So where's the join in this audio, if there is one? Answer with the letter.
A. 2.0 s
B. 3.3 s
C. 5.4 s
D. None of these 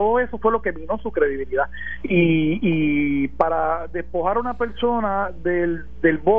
A